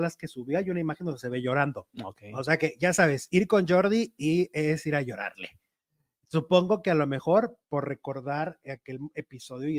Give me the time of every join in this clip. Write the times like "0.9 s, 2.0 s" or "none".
1.9 s